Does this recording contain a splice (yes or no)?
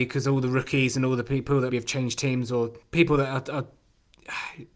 yes